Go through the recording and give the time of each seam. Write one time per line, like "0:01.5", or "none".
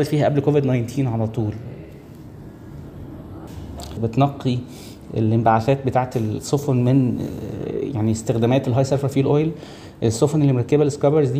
0:04.0

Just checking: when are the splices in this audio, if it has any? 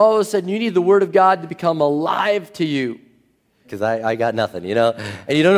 0:03.6

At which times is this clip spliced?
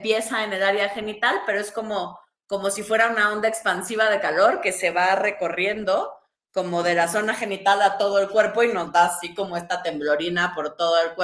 none

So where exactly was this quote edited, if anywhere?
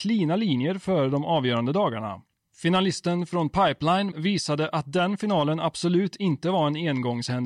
0:04.1

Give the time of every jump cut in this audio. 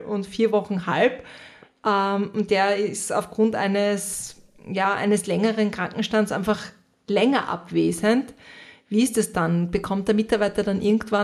none

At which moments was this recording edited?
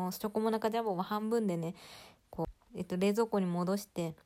0:02.7

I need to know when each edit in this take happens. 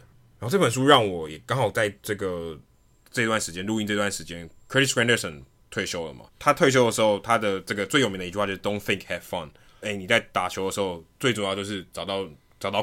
0:06.3
0:09.8

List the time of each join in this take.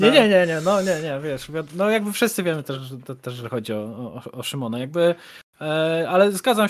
none

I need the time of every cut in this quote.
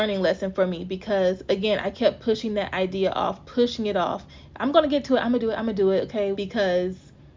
0:06.3

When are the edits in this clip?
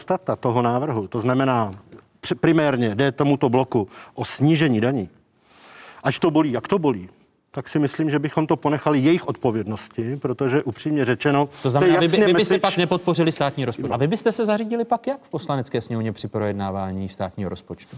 0:13.9

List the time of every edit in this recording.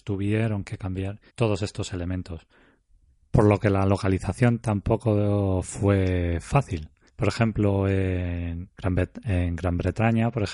0:01.3
0:07.1
0:08.7

